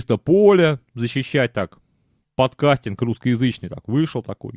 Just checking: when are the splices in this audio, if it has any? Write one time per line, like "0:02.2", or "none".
none